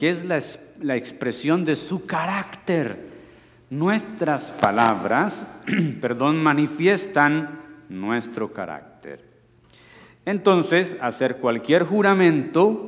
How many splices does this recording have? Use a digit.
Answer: 0